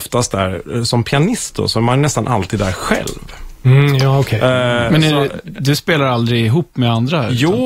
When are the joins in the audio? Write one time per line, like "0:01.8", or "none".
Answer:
none